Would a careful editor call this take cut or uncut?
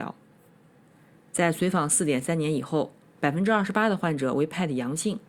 cut